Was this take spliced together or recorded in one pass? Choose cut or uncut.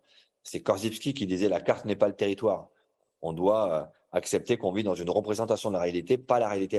uncut